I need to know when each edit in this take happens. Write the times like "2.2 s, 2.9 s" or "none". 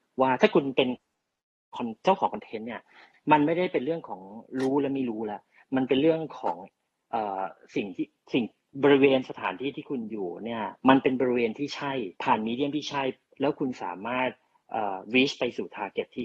10.8 s, 12.2 s